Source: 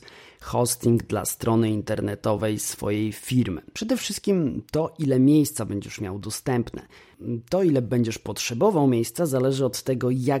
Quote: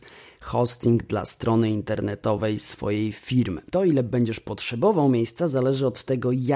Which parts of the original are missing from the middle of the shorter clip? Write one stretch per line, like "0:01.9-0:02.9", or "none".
0:03.7-0:07.5